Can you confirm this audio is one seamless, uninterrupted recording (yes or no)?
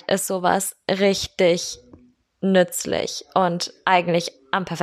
yes